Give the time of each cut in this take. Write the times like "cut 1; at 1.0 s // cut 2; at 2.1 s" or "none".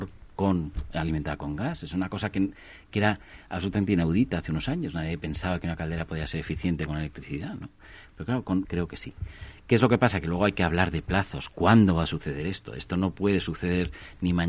cut 1; at 8.6 s